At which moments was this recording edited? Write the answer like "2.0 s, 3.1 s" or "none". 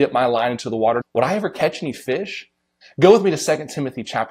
1.0 s, 2.8 s